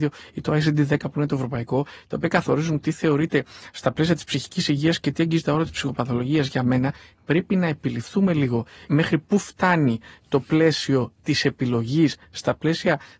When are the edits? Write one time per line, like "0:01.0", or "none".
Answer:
none